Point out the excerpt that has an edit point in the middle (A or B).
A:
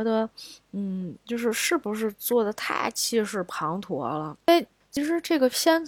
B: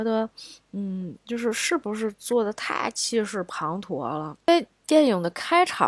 A